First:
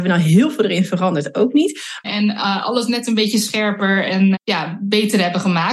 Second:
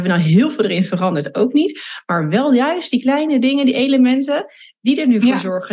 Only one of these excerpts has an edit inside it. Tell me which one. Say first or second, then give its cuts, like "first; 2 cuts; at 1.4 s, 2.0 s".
first; 2 cuts; at 2.0 s, 4.3 s